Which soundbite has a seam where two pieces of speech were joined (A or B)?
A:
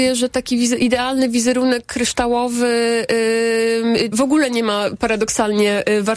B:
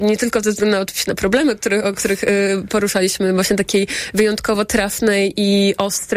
A